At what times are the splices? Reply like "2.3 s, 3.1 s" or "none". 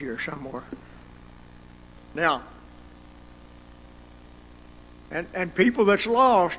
2.0 s

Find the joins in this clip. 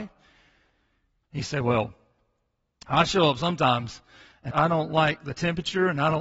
1.2 s, 4.5 s

